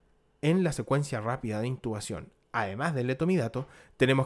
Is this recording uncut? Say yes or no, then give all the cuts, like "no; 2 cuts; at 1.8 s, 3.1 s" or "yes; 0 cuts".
yes; 0 cuts